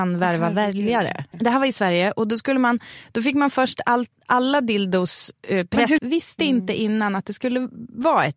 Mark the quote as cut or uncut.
cut